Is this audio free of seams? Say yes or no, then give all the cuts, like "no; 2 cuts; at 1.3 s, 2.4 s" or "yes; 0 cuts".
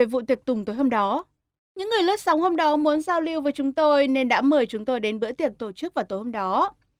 no; 1 cut; at 1.6 s